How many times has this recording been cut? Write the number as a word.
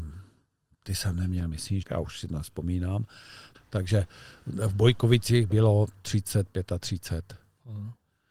two